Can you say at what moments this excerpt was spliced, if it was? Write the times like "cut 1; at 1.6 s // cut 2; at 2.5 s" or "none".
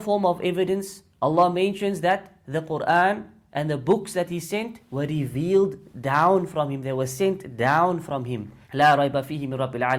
cut 1; at 1.1 s // cut 2; at 8.6 s